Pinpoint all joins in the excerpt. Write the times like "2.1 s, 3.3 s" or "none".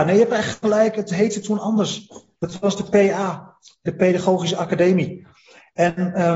none